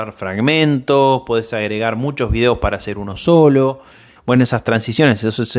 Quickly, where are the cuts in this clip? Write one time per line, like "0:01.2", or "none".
0:04.2